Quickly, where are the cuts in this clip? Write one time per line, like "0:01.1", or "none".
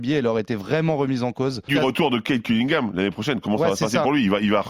0:01.7